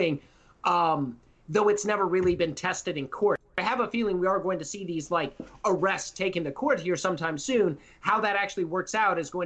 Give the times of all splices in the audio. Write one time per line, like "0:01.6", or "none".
none